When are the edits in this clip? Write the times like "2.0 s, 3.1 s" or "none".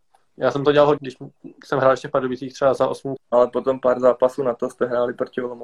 1.0 s, 3.2 s